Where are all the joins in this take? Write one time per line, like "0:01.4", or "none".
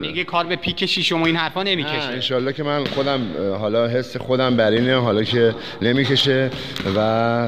none